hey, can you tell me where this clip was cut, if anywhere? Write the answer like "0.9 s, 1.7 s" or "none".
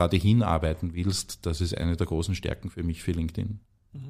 none